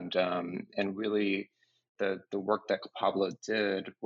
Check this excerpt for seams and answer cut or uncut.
uncut